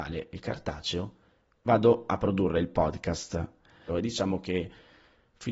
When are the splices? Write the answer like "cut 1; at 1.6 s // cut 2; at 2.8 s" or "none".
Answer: cut 1; at 3.9 s